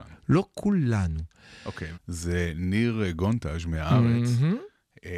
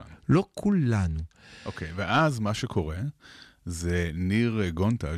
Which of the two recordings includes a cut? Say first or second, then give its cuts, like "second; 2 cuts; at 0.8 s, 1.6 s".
first; 1 cut; at 1.9 s